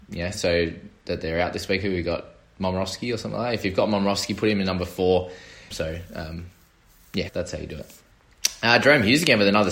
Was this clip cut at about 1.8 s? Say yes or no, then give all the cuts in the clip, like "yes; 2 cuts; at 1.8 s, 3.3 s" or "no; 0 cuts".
no; 2 cuts; at 5.7 s, 7.3 s